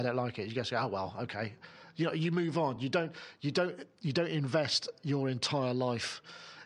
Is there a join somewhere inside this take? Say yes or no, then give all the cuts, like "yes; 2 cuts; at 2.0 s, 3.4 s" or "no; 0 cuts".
no; 0 cuts